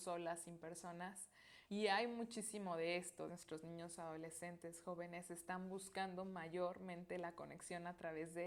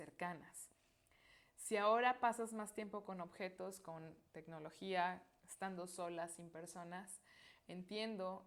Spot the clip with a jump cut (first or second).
first